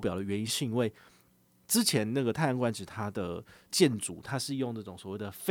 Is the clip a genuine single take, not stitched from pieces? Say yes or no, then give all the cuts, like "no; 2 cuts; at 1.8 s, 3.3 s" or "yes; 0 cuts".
yes; 0 cuts